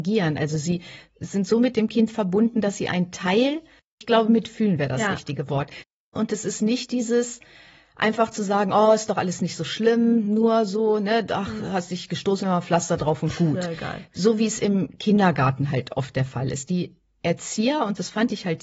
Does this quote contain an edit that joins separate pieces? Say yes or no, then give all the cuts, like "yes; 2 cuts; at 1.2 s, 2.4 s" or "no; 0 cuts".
no; 0 cuts